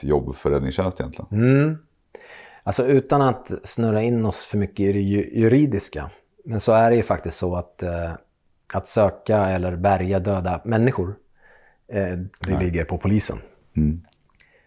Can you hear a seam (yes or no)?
yes